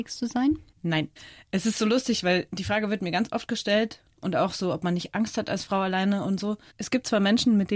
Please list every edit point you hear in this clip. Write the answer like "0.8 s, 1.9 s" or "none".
6.7 s